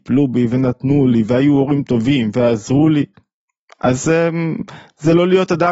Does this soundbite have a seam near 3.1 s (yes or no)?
no